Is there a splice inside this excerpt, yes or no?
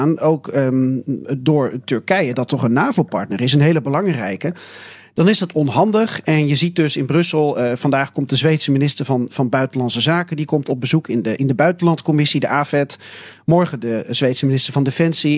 no